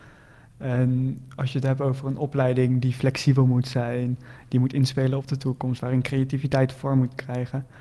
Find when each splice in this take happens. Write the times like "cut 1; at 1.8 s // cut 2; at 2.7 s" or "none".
none